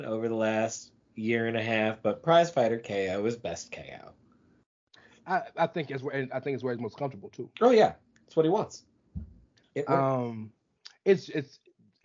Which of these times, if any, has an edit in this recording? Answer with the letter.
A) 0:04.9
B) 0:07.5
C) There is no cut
B